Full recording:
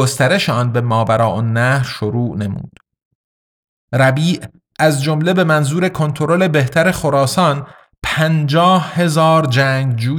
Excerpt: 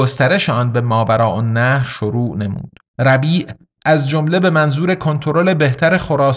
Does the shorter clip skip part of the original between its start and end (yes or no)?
yes